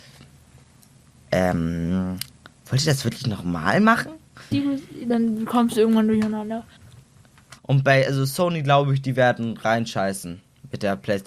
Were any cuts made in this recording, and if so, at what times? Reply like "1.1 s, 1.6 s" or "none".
4.5 s, 7.6 s